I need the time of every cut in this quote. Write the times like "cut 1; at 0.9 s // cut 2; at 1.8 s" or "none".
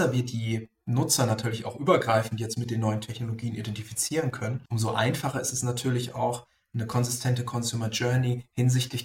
cut 1; at 4.7 s